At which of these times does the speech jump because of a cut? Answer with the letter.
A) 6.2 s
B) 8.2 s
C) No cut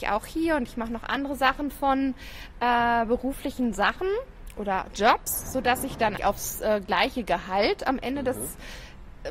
A